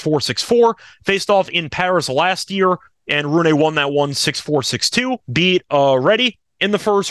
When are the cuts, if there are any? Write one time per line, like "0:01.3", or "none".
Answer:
0:05.3